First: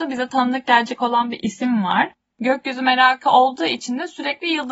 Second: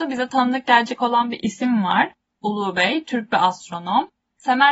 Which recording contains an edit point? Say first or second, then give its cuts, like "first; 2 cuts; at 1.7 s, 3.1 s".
first; 1 cut; at 2.3 s